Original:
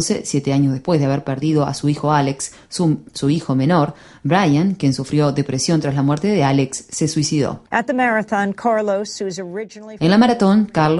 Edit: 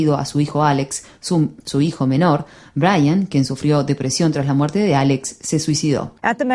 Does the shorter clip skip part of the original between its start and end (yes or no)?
no